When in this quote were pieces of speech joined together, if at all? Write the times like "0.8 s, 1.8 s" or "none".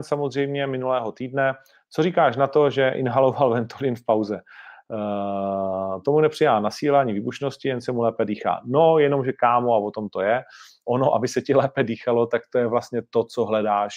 10.9 s